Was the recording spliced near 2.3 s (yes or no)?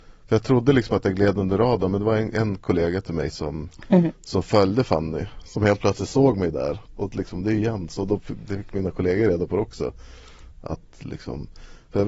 no